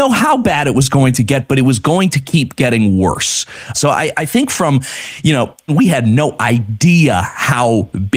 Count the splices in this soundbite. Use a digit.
2